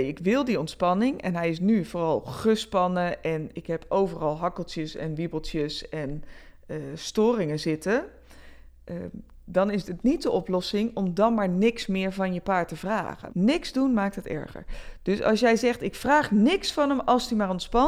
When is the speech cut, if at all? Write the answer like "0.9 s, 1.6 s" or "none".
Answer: 13.3 s